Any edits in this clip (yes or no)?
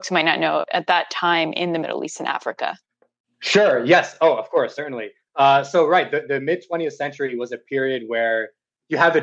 no